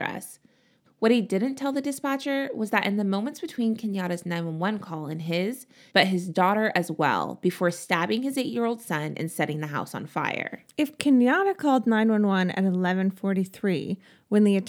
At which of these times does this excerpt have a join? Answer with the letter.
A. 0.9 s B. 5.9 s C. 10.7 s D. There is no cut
B